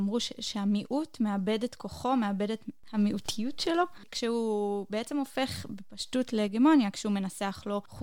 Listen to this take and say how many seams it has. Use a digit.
0